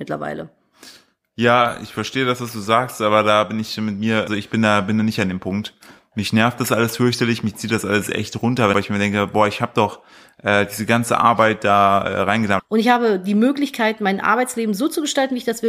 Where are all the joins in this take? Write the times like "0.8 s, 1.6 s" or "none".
4.3 s, 8.7 s, 12.6 s